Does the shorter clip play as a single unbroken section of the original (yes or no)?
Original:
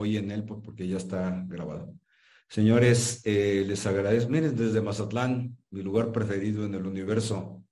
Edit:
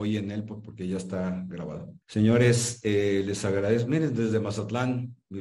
no